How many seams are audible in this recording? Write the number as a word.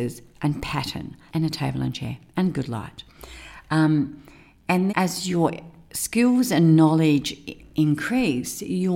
two